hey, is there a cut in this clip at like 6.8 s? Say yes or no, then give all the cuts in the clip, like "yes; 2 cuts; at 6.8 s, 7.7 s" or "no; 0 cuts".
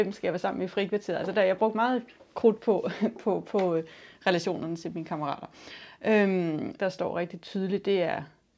yes; 1 cut; at 6.8 s